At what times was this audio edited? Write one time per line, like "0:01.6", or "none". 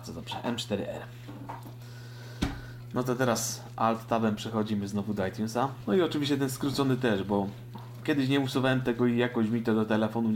0:05.9